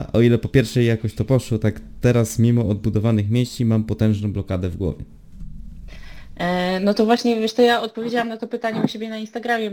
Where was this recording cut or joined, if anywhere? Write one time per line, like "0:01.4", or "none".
none